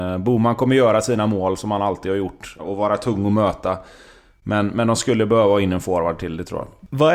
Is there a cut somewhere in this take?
yes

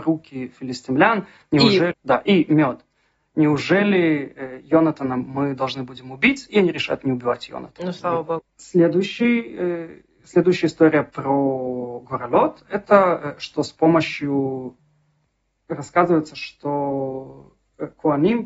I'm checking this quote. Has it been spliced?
yes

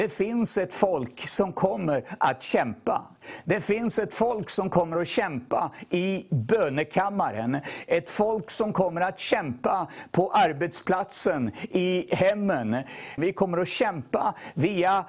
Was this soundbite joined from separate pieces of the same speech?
yes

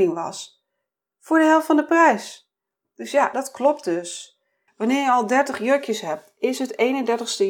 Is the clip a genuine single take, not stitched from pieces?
no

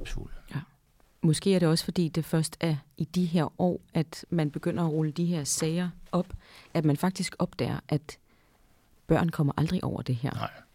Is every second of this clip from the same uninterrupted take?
yes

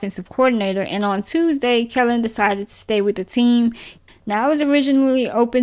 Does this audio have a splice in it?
yes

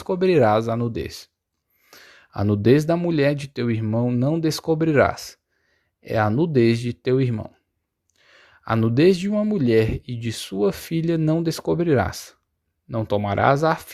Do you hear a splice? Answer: no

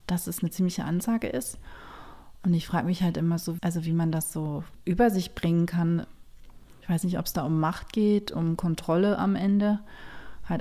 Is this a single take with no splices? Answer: no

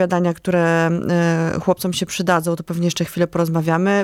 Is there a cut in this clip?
no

